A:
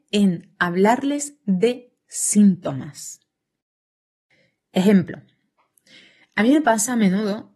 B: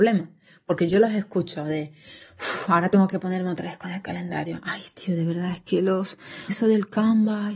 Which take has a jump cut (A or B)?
B